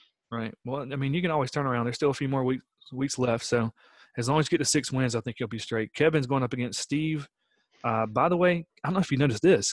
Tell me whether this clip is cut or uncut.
uncut